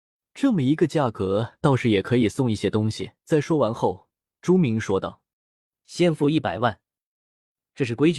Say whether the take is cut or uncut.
cut